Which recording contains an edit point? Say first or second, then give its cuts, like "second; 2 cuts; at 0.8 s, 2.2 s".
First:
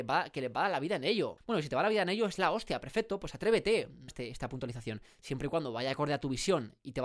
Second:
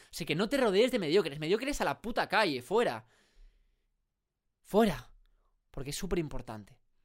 first; 2 cuts; at 1.4 s, 4.1 s